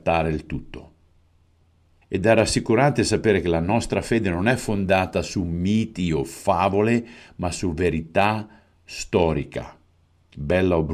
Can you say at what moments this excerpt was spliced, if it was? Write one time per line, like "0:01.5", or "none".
0:02.0